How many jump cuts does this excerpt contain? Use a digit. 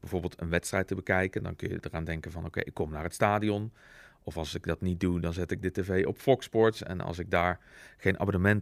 0